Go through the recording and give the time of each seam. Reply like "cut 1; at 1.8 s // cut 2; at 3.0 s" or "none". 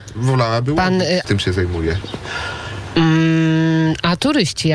cut 1; at 1.2 s